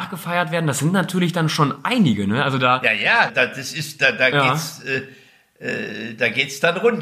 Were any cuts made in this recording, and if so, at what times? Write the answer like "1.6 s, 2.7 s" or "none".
3.3 s